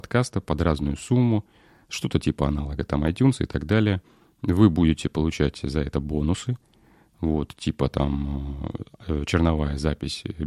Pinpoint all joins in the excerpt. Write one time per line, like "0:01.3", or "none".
none